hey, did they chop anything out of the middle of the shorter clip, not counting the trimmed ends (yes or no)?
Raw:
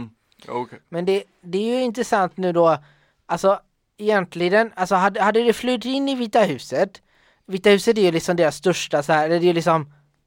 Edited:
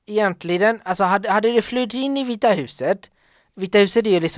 no